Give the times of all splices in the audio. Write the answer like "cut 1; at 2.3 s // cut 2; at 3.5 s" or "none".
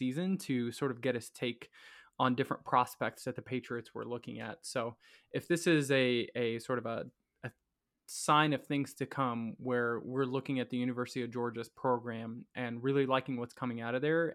none